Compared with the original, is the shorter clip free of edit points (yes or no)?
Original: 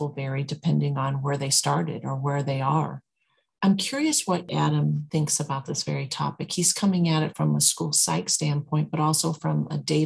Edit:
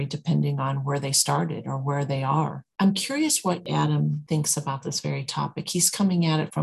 no